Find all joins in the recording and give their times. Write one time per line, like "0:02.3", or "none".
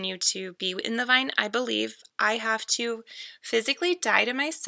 none